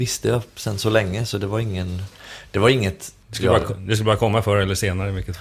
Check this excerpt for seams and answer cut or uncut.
uncut